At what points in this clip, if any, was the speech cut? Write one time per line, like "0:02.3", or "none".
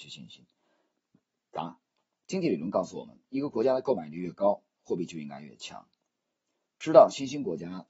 0:01.4